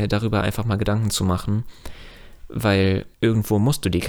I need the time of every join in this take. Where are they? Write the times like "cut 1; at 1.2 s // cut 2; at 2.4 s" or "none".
cut 1; at 3.1 s